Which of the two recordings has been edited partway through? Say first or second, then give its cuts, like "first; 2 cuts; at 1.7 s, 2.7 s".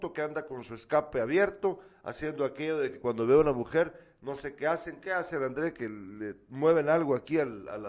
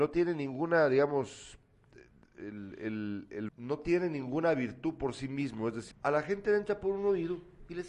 second; 2 cuts; at 3.5 s, 5.9 s